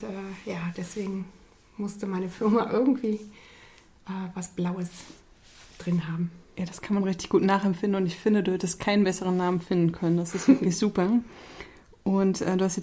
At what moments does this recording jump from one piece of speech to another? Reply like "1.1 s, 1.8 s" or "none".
none